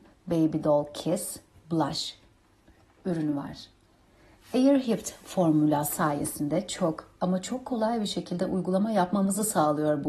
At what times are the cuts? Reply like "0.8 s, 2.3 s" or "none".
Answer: none